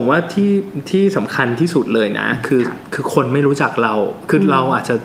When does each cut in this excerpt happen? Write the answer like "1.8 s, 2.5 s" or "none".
none